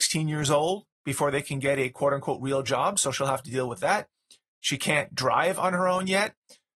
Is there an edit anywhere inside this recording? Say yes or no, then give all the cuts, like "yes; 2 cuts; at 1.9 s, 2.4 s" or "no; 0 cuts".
no; 0 cuts